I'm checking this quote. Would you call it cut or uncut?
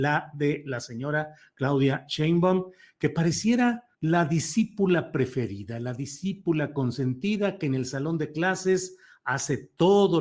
cut